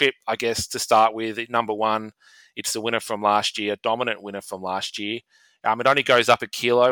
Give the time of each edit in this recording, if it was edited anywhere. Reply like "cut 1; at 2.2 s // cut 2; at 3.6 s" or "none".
none